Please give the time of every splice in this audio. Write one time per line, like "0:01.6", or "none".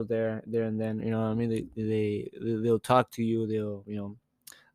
none